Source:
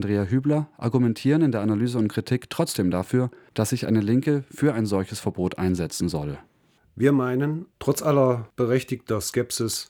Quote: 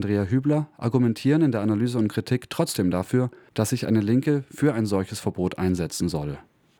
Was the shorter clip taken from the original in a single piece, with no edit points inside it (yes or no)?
yes